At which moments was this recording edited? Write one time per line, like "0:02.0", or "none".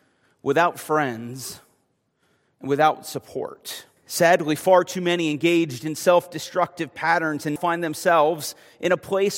0:04.0
0:07.6